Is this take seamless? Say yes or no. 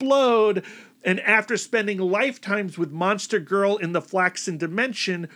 yes